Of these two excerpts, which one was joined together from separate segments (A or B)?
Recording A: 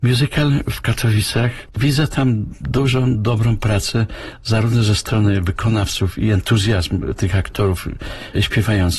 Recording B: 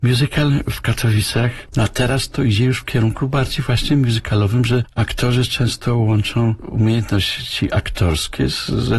B